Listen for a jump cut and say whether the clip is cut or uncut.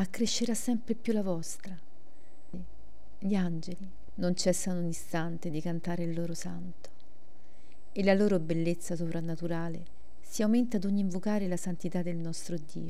cut